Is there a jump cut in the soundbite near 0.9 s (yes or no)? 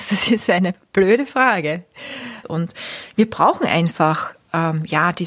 no